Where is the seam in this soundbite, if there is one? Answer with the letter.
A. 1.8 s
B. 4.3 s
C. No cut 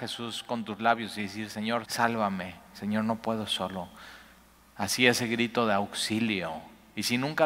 A